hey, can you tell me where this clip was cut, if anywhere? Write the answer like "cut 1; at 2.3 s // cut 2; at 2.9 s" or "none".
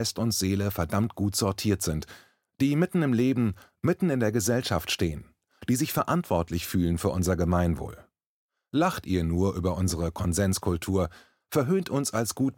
none